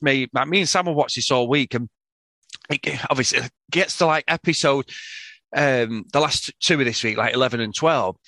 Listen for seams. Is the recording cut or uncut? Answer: uncut